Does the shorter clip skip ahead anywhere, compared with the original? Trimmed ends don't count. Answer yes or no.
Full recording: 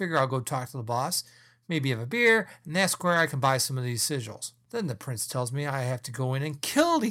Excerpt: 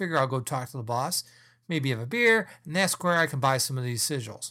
no